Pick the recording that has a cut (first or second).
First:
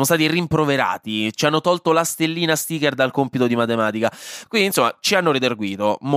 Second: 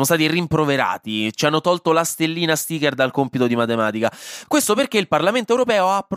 first